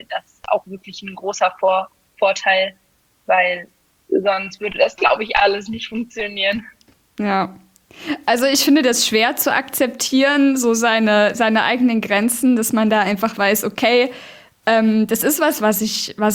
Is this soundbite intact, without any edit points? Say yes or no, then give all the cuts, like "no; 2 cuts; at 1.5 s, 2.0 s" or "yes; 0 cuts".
yes; 0 cuts